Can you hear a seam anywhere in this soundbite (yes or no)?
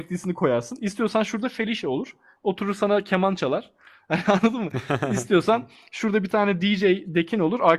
no